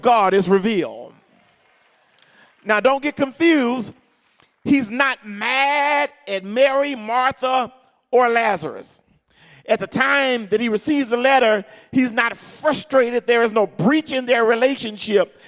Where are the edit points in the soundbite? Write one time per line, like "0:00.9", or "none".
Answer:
none

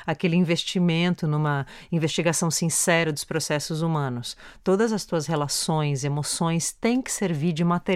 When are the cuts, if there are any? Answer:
none

